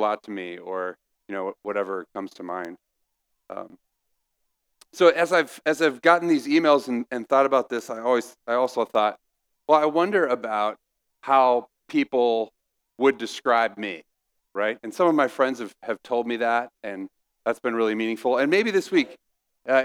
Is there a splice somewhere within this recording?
no; 0 cuts

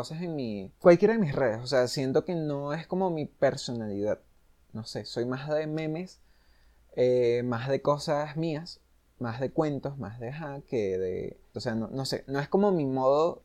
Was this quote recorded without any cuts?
no; 1 cut; at 11.5 s

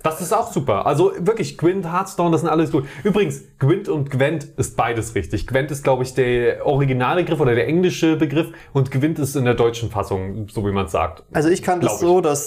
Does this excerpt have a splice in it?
no; 0 cuts

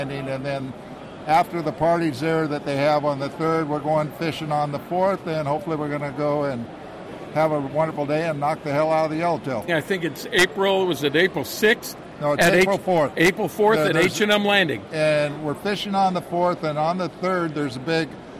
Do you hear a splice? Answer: yes; 1 cut; at 9.7 s

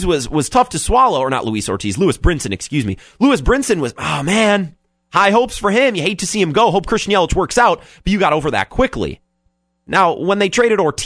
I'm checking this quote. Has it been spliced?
no; 0 cuts

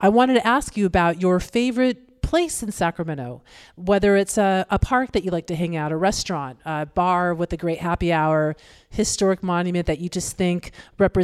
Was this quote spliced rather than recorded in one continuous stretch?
no; 0 cuts

